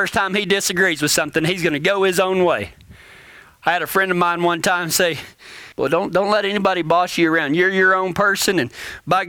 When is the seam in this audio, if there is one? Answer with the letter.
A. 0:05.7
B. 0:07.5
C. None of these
A